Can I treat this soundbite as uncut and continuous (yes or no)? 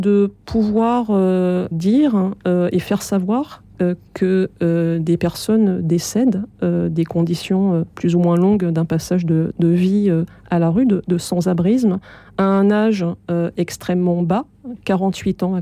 no